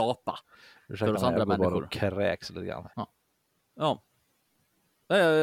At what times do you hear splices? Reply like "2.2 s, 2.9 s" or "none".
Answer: 2.9 s